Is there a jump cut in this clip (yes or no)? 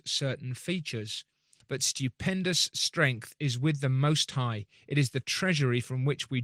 yes